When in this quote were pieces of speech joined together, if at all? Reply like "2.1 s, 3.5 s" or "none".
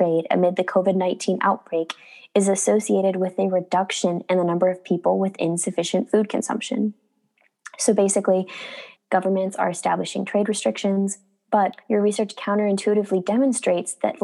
9.0 s